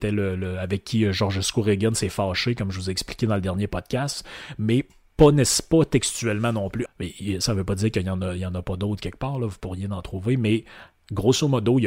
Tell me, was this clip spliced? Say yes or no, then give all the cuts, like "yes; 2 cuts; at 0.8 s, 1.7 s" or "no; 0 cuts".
yes; 1 cut; at 6.9 s